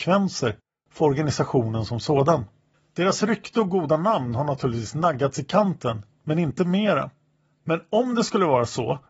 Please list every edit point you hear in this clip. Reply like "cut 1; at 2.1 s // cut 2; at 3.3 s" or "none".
none

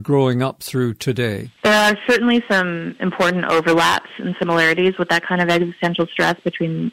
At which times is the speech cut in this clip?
cut 1; at 1.6 s

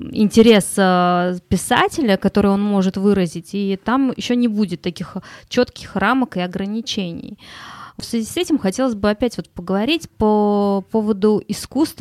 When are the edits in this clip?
none

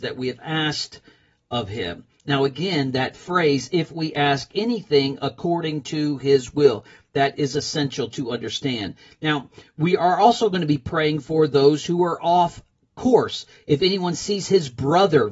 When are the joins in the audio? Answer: none

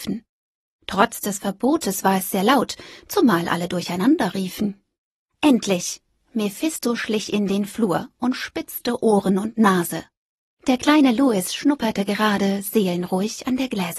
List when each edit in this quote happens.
none

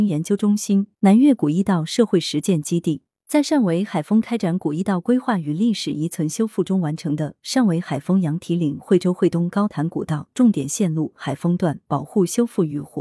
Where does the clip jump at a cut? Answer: cut 1; at 0.9 s // cut 2; at 3.2 s

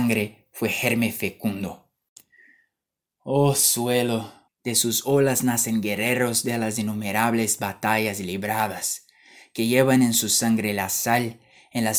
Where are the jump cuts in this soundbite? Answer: cut 1; at 4.5 s

